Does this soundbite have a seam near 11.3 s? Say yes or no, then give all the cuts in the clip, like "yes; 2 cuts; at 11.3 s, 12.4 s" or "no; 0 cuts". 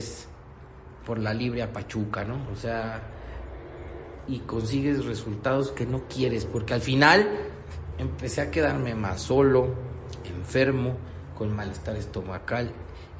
no; 2 cuts; at 4.3 s, 7.9 s